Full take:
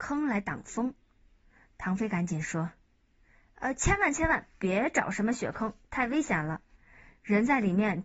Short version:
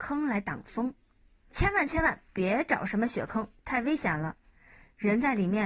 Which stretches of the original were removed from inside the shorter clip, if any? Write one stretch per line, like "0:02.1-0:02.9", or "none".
0:01.5-0:03.8